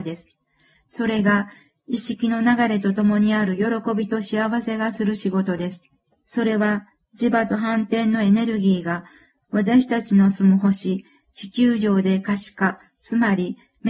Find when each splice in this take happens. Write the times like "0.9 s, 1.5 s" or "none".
6.1 s